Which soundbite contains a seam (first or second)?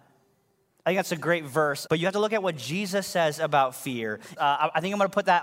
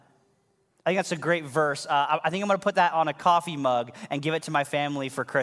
first